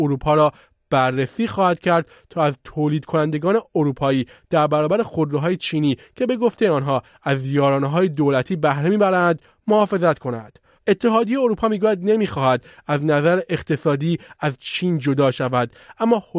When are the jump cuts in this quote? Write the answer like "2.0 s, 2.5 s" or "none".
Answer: 10.8 s